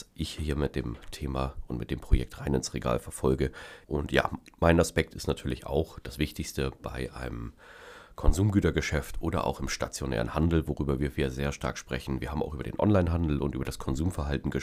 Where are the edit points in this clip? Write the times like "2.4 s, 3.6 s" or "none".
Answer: 3.8 s

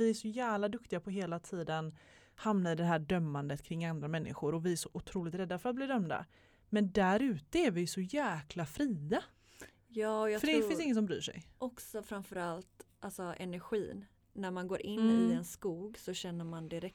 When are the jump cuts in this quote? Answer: none

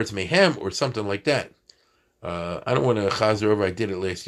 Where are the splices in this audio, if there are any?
none

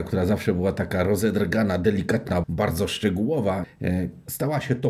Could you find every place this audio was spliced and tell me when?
2.4 s, 3.6 s

